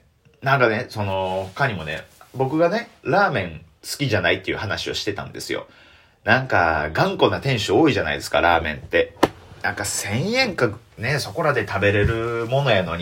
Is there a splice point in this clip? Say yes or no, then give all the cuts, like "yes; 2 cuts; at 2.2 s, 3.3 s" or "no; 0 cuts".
no; 0 cuts